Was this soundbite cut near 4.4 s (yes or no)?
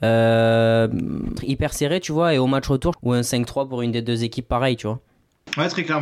no